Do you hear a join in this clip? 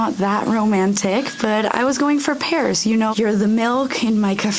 yes; 1 cut; at 3.1 s

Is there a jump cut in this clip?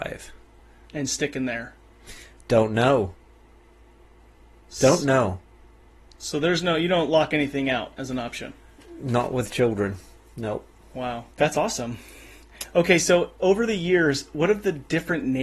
yes; 1 cut; at 11.3 s

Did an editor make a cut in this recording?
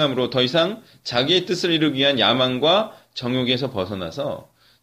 no; 0 cuts

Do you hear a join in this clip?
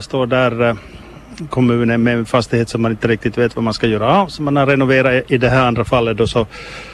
no; 0 cuts

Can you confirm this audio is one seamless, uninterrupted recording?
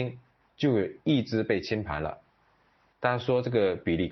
yes; 0 cuts

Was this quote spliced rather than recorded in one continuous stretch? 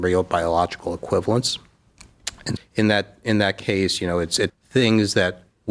yes; 2 cuts; at 2.6 s, 4.5 s

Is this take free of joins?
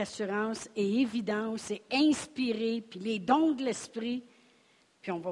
yes; 0 cuts

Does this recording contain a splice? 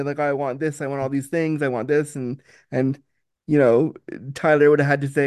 no; 0 cuts

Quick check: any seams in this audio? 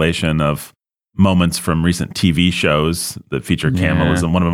no; 0 cuts

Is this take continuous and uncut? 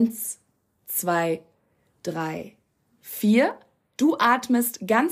no; 1 cut; at 4.0 s

